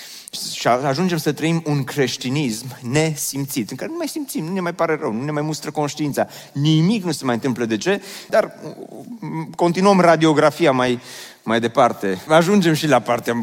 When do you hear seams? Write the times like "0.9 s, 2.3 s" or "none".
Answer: 8.3 s, 12.3 s

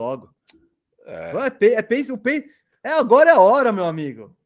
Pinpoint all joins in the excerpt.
none

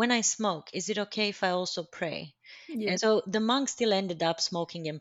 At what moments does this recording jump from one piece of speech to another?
2.9 s

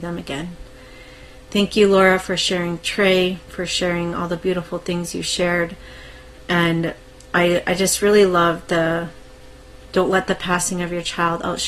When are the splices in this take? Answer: none

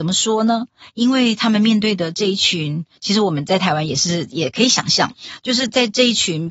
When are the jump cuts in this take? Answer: none

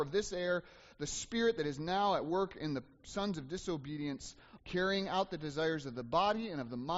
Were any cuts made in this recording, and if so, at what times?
4.6 s

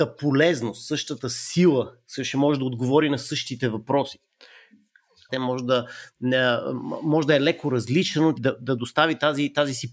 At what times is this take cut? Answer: 5.3 s, 8.3 s

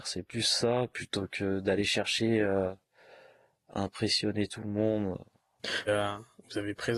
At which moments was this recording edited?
5.9 s

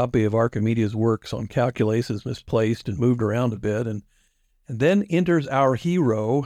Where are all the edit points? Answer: none

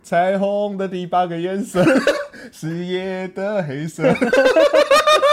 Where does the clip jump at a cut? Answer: 2.2 s

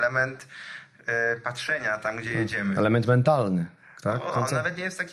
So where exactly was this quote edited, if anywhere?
none

